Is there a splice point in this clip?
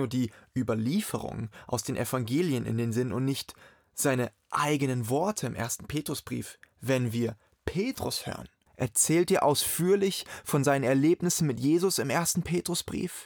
yes; 1 cut; at 8.7 s

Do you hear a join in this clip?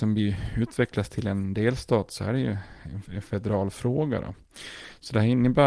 no; 0 cuts

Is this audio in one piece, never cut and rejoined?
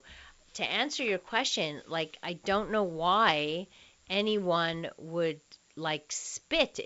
yes; 0 cuts

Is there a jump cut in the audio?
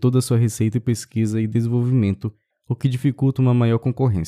yes; 1 cut; at 2.5 s

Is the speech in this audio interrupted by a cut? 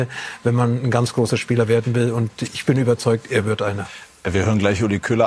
no; 0 cuts

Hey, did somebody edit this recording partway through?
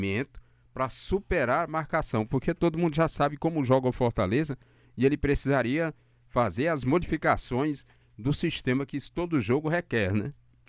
no; 0 cuts

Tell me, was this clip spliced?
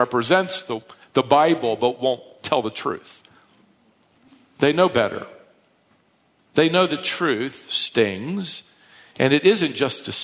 no; 0 cuts

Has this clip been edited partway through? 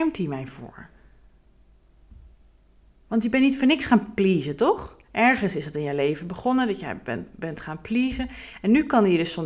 yes; 1 cut; at 5.0 s

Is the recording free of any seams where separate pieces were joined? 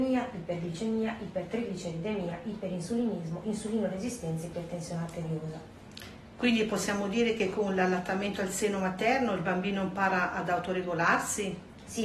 yes; 0 cuts

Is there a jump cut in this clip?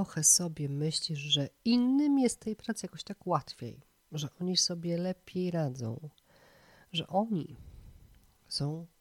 no; 0 cuts

